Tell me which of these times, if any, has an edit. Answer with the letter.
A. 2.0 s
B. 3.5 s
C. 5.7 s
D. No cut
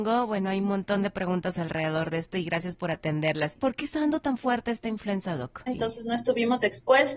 C